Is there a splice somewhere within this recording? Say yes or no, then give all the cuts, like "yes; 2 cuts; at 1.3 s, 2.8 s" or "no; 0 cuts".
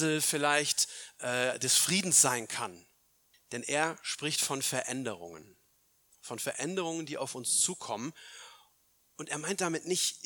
yes; 1 cut; at 3.3 s